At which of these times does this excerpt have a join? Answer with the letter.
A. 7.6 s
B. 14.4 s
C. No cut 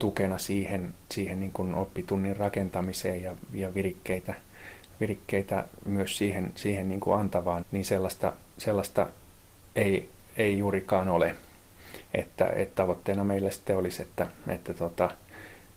A